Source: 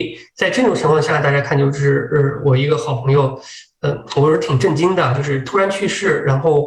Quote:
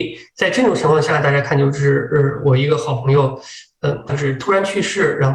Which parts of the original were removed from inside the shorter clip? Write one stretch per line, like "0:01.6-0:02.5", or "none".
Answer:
0:04.1-0:05.2